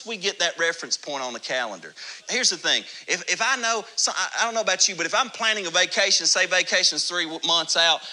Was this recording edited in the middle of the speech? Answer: yes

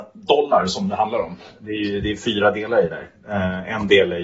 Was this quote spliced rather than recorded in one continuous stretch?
no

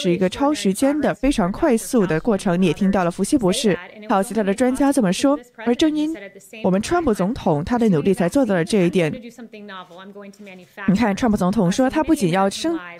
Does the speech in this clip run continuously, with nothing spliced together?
yes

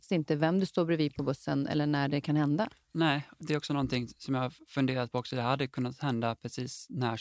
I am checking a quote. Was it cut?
yes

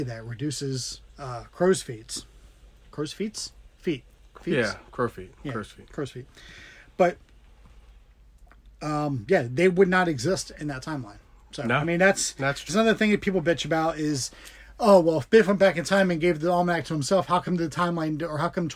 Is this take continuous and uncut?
no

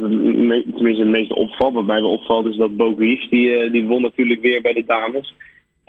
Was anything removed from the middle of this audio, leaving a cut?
no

